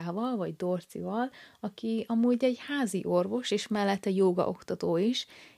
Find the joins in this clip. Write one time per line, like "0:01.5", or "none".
none